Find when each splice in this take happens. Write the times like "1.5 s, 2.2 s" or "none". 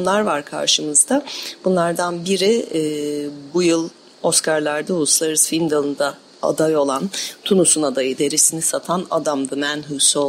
8.2 s